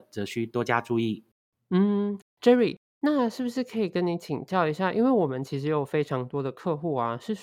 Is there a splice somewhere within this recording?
no; 0 cuts

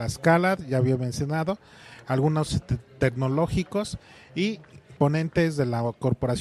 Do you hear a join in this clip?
yes; 1 cut; at 5.0 s

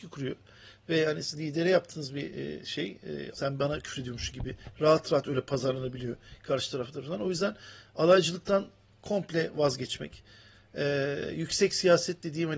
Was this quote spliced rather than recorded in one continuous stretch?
yes; 1 cut; at 3.3 s

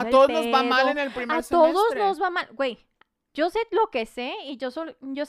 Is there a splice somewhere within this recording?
yes; 1 cut; at 3.3 s

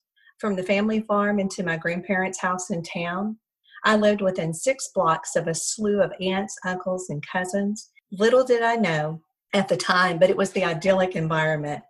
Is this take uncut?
yes; 0 cuts

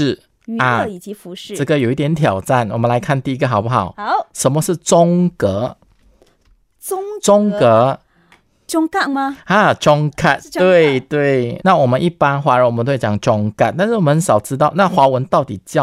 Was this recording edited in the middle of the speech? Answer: yes; 1 cut; at 11.6 s

